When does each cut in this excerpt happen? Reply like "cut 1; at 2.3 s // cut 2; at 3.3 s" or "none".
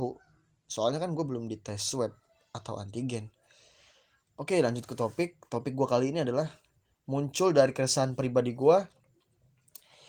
cut 1; at 4.2 s